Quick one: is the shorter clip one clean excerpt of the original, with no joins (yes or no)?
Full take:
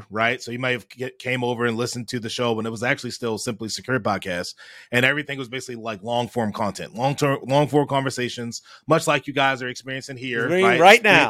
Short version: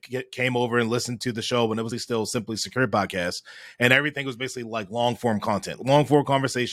no